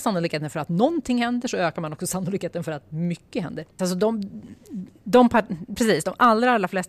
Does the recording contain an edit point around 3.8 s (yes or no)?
yes